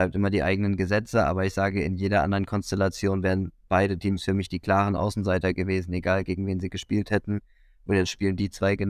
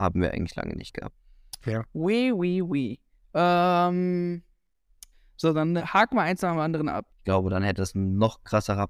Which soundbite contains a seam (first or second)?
second